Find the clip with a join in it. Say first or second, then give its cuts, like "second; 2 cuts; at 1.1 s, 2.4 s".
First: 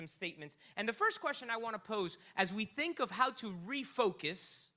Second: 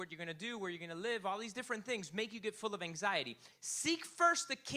second; 1 cut; at 3.5 s